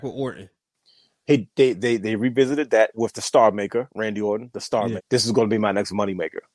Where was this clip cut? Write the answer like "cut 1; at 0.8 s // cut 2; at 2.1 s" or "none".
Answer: cut 1; at 5.0 s